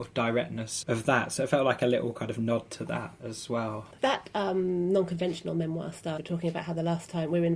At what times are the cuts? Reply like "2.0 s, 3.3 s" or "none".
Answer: 6.2 s